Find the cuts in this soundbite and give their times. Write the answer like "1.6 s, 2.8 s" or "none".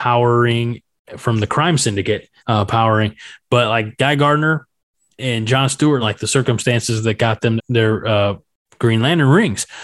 2.4 s, 6.0 s, 7.6 s